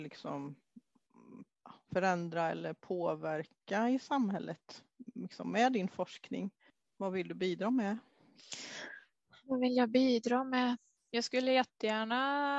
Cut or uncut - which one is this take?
uncut